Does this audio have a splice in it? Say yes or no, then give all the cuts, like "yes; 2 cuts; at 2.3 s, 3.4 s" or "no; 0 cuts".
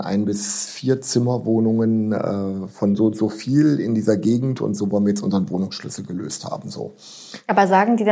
no; 0 cuts